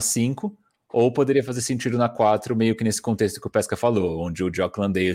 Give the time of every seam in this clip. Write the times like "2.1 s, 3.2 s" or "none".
none